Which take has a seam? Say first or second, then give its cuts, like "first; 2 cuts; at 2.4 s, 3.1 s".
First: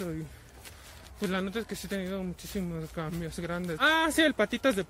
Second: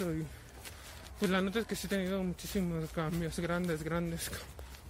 first; 1 cut; at 3.8 s